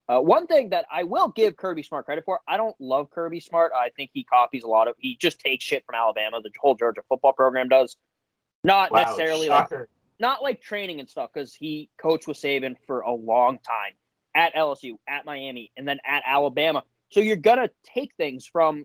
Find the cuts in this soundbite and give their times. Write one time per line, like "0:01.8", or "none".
0:10.2